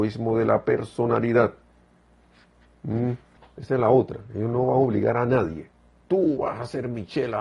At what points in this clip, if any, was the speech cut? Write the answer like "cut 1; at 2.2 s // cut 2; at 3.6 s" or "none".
cut 1; at 3.4 s